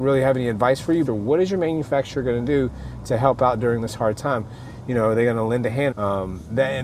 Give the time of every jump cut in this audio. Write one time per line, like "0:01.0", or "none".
0:01.1
0:05.9

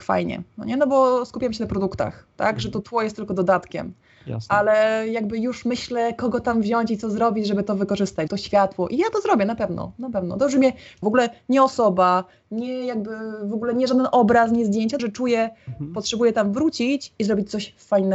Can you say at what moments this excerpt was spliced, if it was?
0:08.3
0:11.0
0:15.0

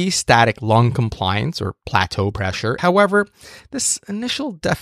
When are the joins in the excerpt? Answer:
0:02.8

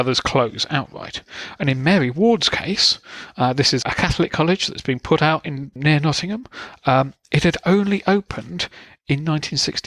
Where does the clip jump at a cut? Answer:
0:03.8
0:05.8

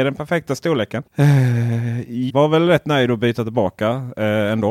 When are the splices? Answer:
0:01.1
0:02.3

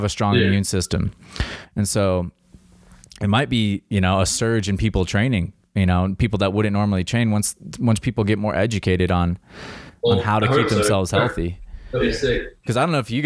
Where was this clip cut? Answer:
none

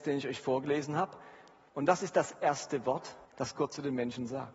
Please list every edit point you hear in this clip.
0:01.7
0:03.2

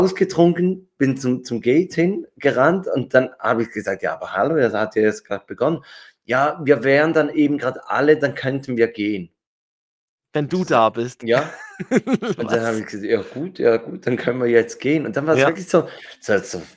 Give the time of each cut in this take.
none

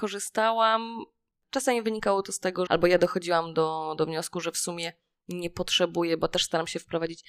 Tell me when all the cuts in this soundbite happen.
0:01.4
0:02.7

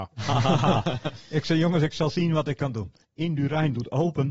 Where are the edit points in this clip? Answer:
0:03.0

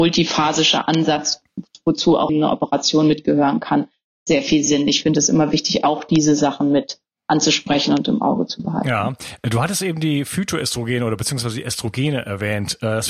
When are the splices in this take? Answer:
0:02.3

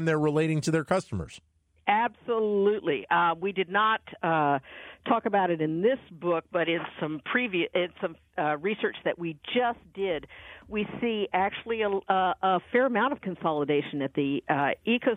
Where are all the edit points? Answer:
none

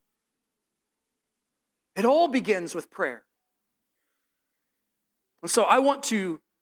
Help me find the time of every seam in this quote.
0:01.9

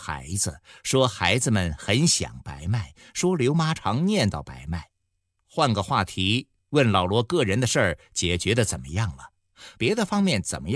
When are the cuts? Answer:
0:03.8
0:05.4
0:09.8

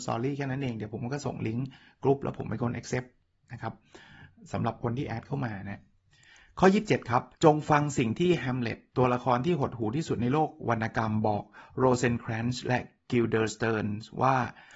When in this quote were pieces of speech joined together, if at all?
0:07.3

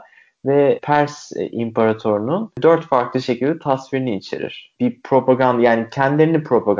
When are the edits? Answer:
0:04.8

